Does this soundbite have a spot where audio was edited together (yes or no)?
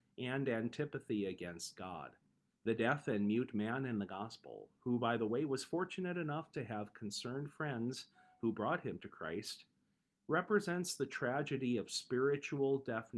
yes